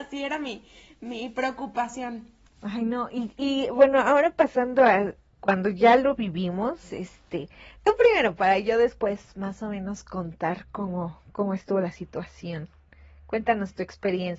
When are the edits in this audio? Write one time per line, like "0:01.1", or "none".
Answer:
none